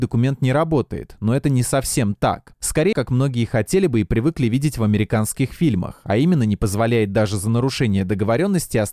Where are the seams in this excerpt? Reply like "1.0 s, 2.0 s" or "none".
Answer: 2.9 s